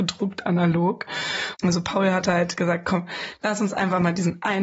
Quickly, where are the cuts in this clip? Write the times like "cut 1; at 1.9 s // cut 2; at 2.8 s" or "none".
cut 1; at 1.5 s